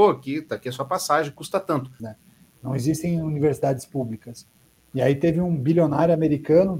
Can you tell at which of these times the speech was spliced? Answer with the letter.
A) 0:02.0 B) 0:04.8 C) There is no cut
A